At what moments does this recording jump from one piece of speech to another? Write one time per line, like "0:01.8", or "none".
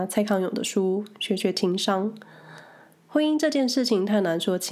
none